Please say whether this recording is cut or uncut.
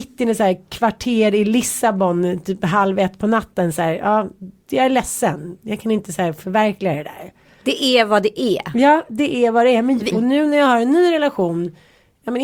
cut